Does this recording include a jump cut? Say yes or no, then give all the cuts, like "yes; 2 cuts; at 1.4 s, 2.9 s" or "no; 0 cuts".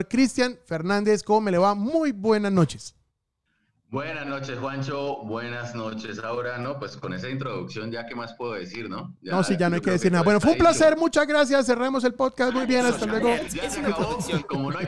no; 0 cuts